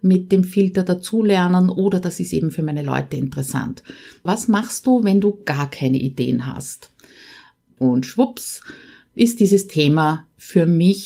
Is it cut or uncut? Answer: cut